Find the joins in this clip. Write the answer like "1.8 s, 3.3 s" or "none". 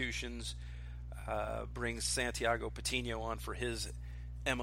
none